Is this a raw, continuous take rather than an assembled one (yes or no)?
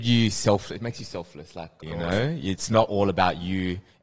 no